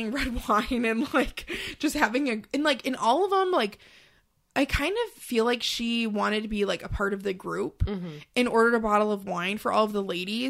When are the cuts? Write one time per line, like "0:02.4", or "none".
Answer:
none